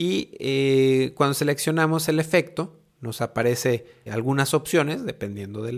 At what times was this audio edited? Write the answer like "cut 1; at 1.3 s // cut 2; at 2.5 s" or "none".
cut 1; at 4.1 s

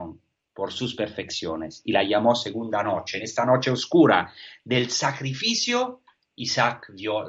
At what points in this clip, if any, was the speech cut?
none

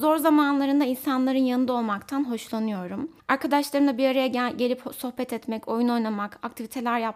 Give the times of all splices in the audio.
cut 1; at 3.2 s

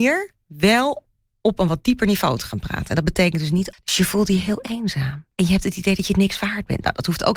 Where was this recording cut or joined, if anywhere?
cut 1; at 3.7 s // cut 2; at 5.3 s

